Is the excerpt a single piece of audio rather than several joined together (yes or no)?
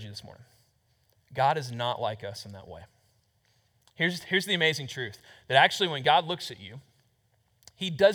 yes